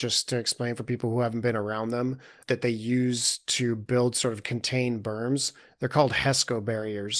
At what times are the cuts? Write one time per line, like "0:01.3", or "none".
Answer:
0:02.4